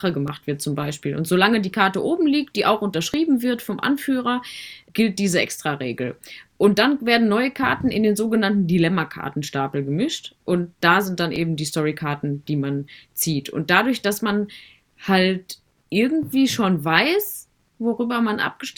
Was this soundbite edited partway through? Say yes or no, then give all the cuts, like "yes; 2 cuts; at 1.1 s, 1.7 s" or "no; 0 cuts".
no; 0 cuts